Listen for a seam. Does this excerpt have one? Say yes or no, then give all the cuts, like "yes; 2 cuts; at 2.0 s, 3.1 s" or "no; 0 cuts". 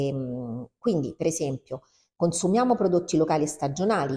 no; 0 cuts